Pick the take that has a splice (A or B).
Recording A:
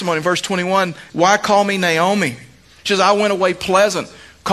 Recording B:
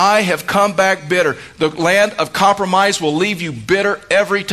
A